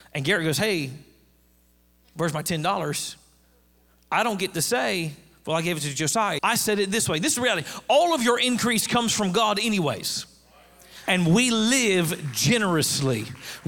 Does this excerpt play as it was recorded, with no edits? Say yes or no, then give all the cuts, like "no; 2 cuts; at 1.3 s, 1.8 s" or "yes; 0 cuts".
no; 2 cuts; at 6.4 s, 11.1 s